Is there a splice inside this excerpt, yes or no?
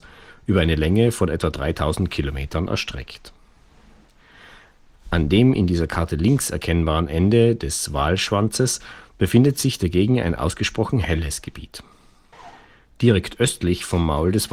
no